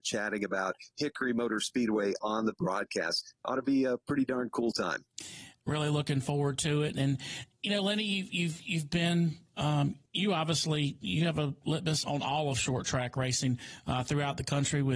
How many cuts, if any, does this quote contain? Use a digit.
2